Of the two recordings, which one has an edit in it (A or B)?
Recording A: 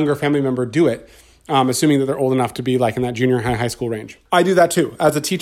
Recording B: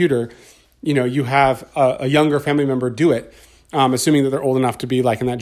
A